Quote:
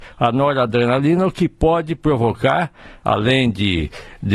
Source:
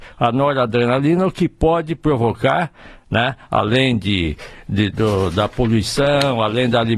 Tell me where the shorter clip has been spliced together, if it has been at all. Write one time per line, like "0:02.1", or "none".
0:03.0